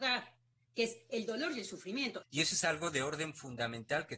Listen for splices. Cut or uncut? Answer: cut